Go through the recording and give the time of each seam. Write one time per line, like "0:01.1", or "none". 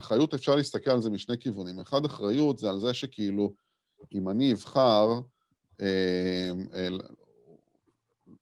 none